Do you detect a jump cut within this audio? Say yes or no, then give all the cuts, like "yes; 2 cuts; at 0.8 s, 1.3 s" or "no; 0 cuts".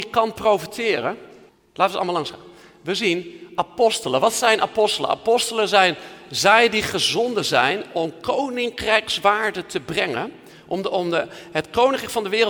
yes; 1 cut; at 1.5 s